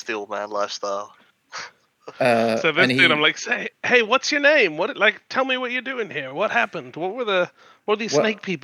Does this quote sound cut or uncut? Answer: uncut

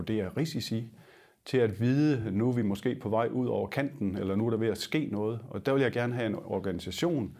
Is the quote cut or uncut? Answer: uncut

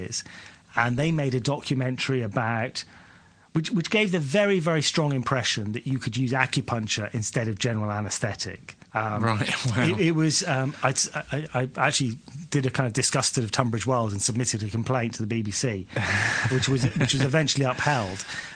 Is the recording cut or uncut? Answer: cut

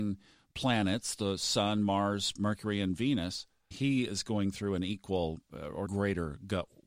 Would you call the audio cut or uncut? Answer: cut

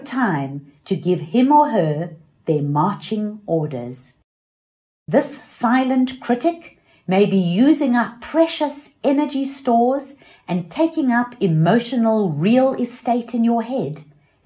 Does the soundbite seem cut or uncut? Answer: uncut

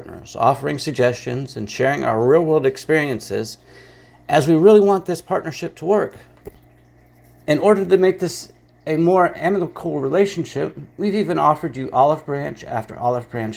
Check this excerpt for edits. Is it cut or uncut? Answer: uncut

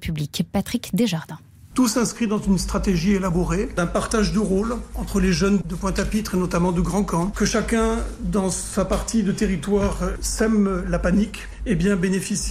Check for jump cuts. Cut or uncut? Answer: uncut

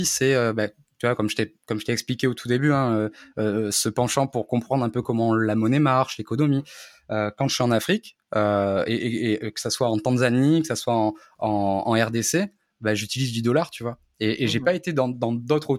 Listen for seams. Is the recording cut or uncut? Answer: uncut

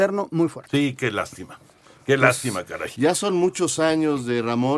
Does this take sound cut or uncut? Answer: uncut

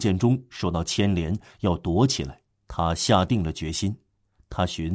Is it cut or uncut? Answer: cut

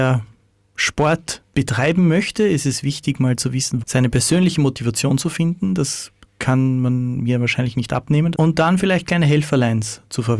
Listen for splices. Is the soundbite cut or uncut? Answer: cut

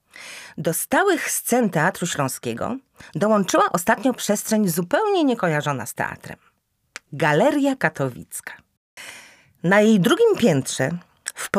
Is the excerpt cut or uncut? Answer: uncut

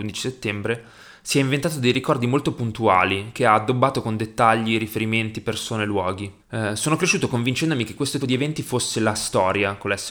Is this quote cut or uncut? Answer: cut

